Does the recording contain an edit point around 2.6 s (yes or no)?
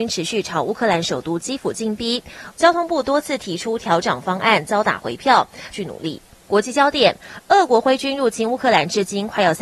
yes